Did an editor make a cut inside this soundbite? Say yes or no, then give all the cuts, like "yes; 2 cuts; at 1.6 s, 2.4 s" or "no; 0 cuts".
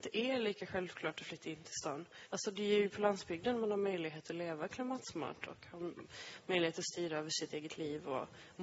yes; 1 cut; at 2.3 s